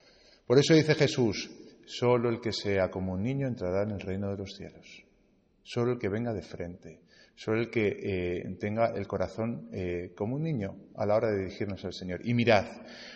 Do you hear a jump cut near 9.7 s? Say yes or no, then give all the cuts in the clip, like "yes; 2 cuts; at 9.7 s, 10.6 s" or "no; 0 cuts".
no; 0 cuts